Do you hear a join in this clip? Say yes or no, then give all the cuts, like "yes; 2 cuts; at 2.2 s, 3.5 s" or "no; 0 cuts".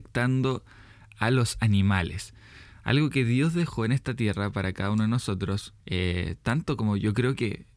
yes; 1 cut; at 5.8 s